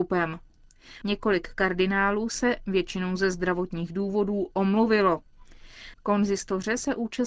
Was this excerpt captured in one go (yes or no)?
no